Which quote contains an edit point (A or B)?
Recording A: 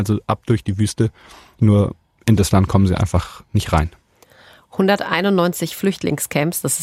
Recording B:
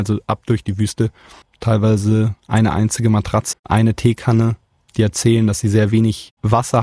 B